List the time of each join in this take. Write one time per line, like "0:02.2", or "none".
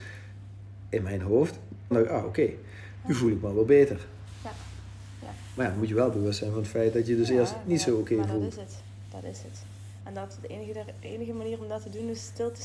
0:01.9